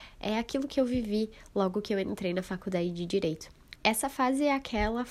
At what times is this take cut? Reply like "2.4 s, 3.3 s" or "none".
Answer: 3.8 s